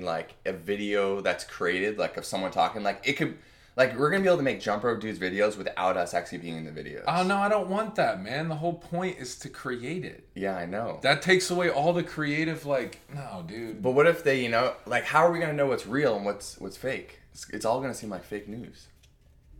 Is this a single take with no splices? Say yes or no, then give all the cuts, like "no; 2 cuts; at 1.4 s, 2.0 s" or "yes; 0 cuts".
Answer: yes; 0 cuts